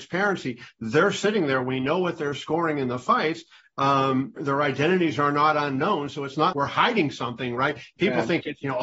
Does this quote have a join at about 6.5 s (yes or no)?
yes